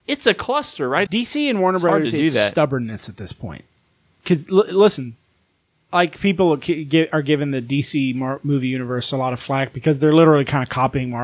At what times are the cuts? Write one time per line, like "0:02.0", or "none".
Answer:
0:01.1